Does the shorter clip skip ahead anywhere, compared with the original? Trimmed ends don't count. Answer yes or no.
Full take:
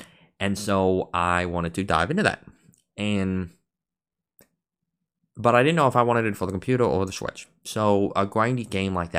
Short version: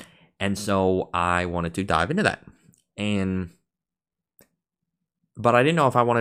no